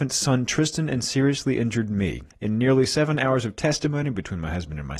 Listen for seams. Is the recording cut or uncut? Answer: cut